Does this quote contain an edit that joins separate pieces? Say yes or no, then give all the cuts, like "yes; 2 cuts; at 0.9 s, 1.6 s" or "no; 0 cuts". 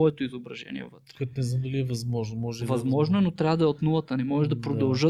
no; 0 cuts